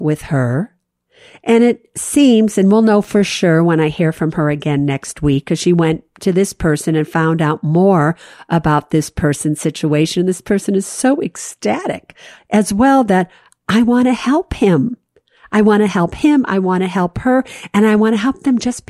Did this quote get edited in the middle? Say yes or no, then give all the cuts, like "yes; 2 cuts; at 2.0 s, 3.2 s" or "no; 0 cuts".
no; 0 cuts